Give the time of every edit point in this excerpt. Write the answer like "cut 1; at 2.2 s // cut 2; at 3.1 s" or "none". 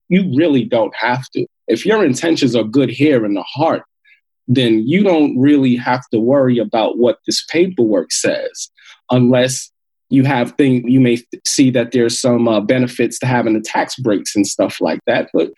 cut 1; at 10.8 s